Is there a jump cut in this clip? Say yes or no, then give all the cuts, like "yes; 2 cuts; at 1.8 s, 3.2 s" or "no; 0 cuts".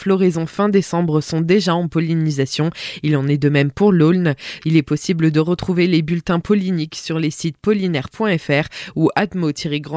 yes; 1 cut; at 4.6 s